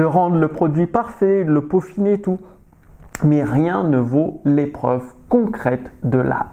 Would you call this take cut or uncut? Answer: uncut